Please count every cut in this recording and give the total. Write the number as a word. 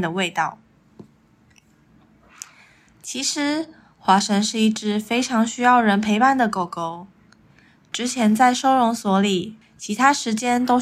one